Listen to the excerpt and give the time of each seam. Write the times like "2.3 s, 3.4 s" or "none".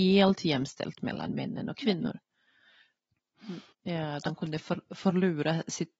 3.7 s